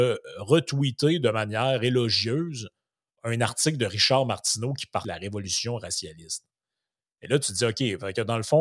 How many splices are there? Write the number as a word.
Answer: one